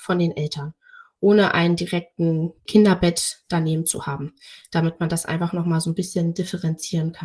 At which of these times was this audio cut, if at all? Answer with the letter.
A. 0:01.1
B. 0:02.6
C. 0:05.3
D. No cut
B